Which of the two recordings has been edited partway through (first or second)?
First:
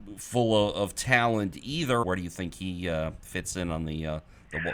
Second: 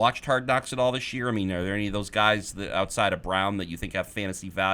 first